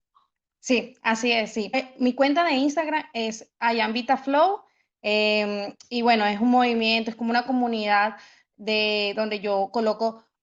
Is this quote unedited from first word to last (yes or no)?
yes